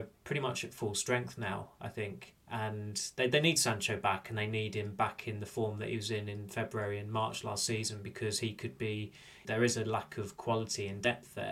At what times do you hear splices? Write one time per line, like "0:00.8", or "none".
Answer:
0:09.4